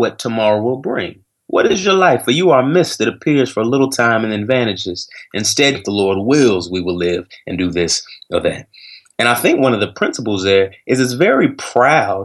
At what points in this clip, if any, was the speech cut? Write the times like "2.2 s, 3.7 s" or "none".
5.7 s